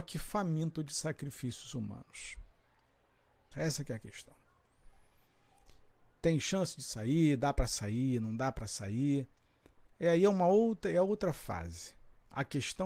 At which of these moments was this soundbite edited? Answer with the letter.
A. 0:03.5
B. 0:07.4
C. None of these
A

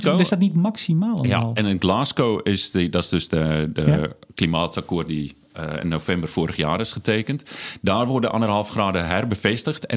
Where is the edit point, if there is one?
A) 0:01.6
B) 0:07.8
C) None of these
C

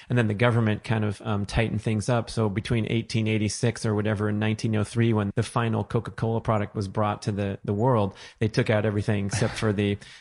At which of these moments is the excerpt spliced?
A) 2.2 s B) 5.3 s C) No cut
B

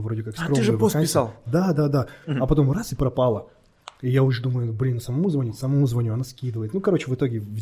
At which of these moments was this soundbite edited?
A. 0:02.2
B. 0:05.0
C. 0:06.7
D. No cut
A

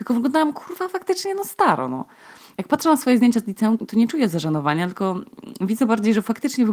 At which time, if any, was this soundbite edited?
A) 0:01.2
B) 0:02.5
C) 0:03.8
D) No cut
C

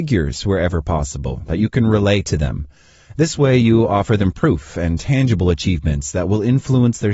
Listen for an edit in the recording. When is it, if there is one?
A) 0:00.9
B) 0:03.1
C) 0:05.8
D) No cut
D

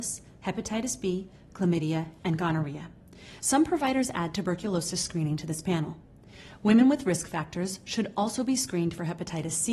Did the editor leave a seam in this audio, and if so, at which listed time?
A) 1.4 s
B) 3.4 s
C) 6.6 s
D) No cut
D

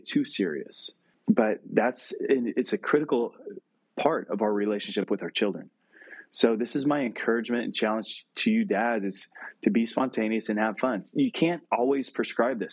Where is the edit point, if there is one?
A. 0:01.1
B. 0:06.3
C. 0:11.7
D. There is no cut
A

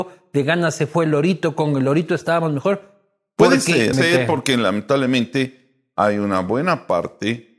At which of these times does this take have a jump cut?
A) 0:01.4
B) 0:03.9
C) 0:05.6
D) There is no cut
B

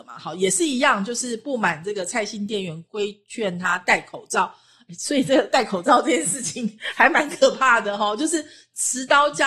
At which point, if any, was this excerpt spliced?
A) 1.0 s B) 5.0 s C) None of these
C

